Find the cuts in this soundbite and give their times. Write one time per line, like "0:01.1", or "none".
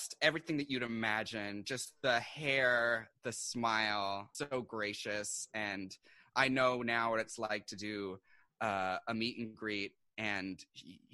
0:04.3

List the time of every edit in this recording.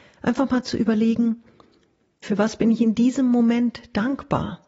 0:02.2

